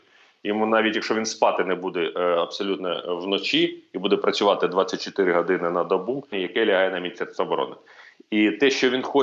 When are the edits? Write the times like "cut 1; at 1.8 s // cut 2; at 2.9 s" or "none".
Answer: cut 1; at 6.3 s